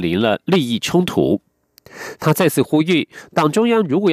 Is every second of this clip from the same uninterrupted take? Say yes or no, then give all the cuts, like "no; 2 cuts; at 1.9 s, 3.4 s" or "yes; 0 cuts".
no; 1 cut; at 2.1 s